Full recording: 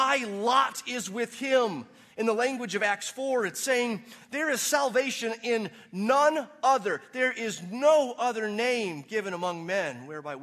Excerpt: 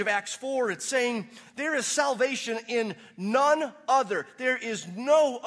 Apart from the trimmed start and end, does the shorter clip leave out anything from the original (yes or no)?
no